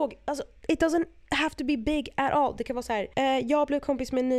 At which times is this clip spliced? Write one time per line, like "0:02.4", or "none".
none